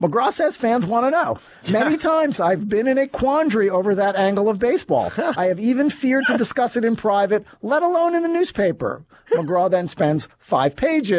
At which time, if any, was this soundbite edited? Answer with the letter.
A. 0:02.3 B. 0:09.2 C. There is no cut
A